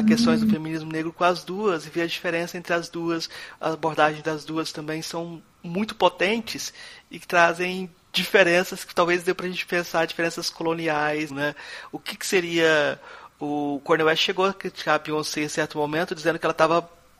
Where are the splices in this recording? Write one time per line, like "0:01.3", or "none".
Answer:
0:05.5
0:11.3